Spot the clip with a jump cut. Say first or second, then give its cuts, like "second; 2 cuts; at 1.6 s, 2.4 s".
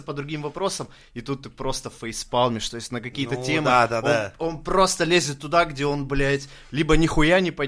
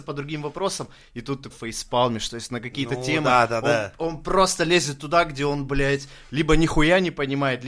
second; 1 cut; at 1.5 s